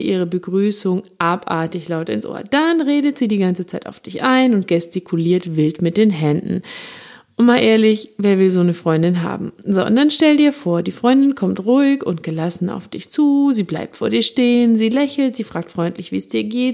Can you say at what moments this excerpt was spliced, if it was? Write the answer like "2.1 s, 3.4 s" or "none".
none

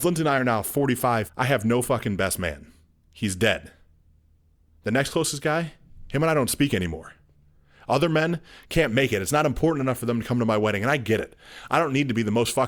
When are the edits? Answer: 1.3 s

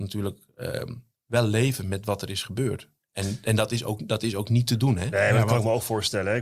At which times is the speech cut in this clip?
none

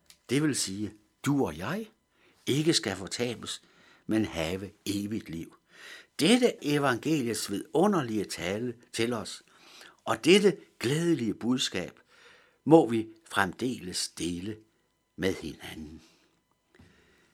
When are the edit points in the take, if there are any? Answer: 6.6 s

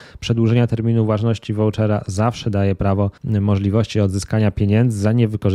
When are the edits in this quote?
3.2 s

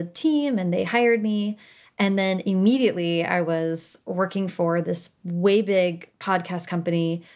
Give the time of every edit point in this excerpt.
none

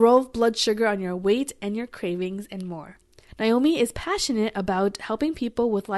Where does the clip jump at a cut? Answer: 3.3 s

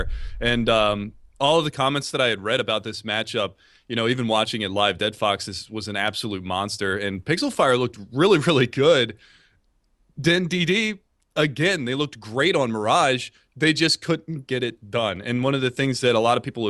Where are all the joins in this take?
none

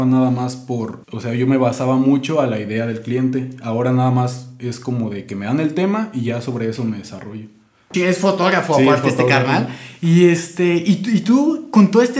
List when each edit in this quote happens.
1.0 s, 7.9 s

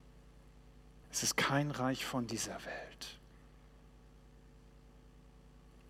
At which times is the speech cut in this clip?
1.0 s

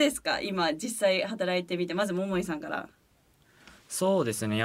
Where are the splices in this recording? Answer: none

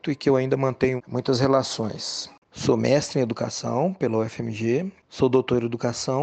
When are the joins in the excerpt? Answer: 2.4 s

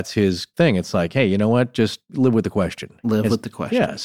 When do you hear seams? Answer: none

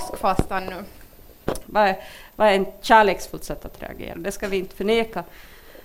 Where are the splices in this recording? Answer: 1.7 s, 4.1 s

